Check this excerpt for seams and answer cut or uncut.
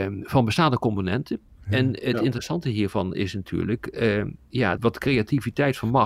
cut